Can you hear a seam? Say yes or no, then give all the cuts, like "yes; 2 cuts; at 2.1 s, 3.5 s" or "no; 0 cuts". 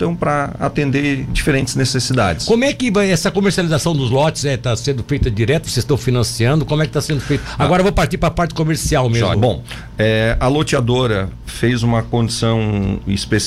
yes; 1 cut; at 9.3 s